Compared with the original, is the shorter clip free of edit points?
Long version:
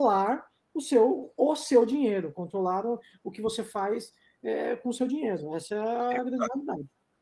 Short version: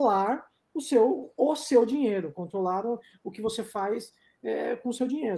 yes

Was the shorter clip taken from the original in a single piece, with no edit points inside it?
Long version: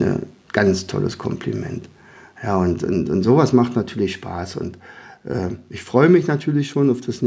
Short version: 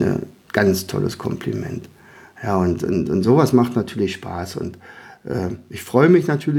yes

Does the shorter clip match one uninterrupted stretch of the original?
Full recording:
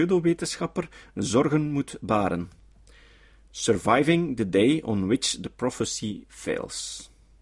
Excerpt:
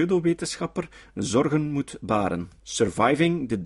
no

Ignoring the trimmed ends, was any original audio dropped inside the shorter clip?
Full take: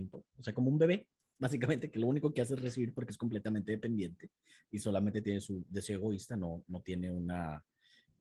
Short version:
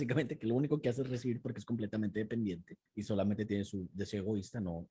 yes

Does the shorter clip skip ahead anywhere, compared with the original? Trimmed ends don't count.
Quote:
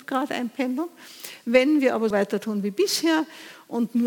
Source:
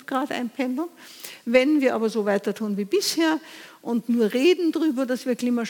yes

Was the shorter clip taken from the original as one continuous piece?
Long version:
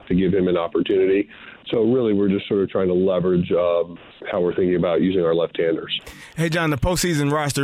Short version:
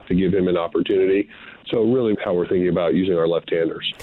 no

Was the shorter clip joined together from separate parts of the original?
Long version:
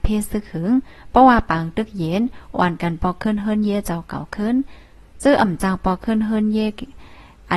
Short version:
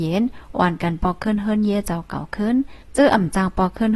yes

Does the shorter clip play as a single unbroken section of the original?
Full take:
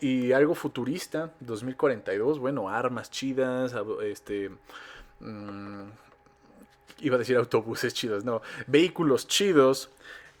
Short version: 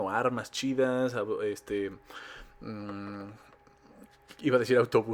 yes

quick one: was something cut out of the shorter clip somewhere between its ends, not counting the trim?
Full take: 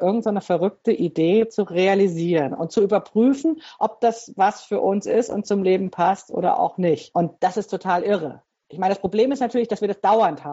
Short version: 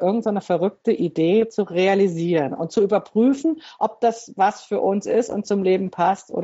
no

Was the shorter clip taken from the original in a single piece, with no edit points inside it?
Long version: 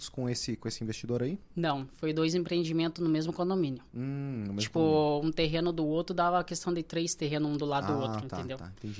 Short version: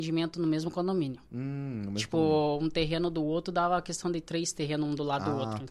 yes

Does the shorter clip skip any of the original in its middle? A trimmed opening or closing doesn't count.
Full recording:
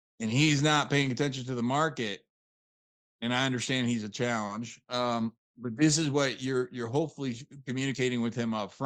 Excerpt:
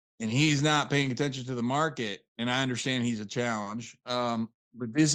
yes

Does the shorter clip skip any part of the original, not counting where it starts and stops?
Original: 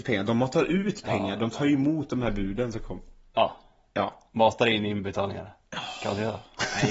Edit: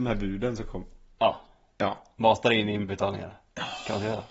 no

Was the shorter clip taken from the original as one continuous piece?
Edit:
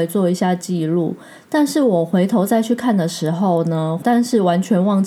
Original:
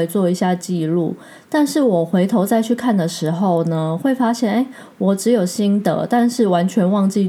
no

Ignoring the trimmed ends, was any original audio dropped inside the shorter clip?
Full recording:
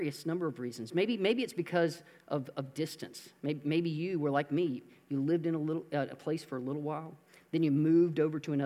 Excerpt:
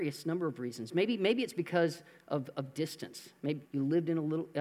yes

